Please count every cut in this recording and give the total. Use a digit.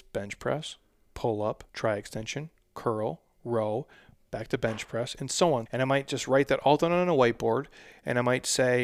2